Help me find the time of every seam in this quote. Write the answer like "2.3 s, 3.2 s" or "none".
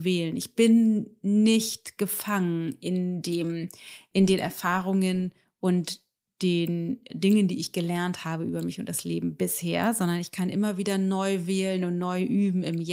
7.1 s